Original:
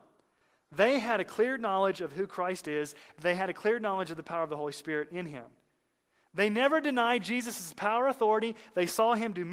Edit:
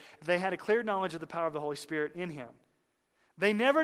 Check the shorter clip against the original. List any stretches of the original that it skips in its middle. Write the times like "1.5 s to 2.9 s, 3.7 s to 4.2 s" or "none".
none